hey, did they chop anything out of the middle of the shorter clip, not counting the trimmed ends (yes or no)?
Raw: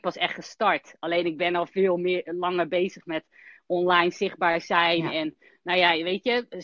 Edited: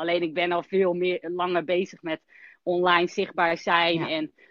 no